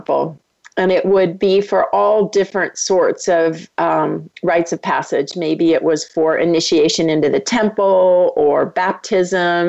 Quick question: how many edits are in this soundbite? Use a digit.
0